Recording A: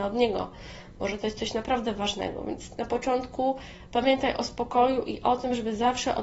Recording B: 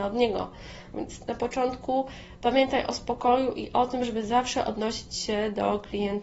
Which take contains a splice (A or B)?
B